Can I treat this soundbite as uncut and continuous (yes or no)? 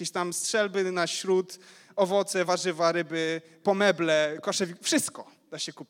yes